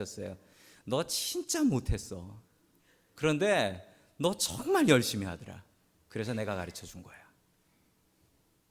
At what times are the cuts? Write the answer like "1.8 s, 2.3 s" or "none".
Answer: none